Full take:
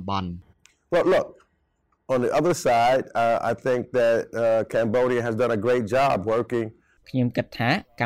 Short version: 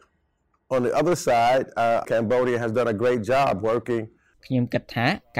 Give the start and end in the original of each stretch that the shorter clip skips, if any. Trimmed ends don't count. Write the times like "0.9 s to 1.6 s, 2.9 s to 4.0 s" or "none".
3.4 s to 4.7 s